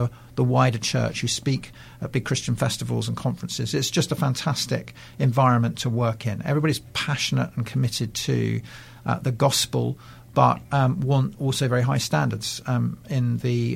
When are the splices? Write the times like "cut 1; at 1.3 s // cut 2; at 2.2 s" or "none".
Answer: none